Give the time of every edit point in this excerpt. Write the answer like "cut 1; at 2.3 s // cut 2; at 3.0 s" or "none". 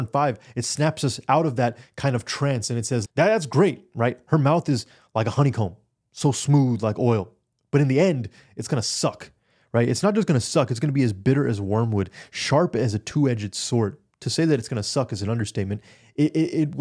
cut 1; at 3.0 s